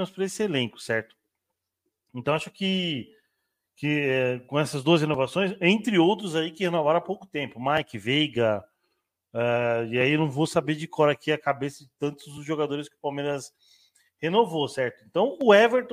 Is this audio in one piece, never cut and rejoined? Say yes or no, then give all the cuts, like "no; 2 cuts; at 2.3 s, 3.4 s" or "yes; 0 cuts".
yes; 0 cuts